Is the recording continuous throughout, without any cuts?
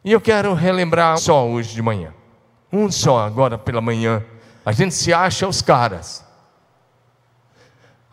no; 2 cuts; at 1.2 s, 4.6 s

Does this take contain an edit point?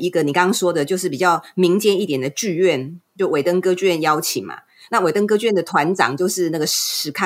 no; 0 cuts

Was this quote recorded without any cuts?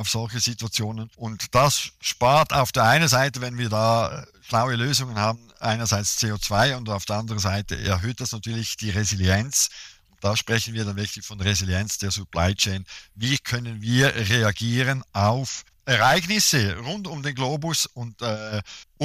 no; 1 cut; at 1.1 s

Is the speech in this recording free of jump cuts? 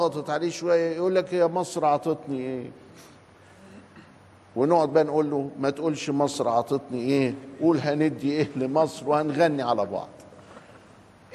yes; 0 cuts

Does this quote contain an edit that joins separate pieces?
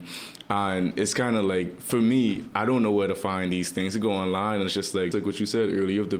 yes; 1 cut; at 5.1 s

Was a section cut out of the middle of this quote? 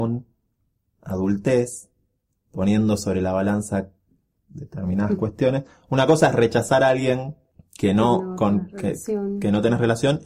no; 0 cuts

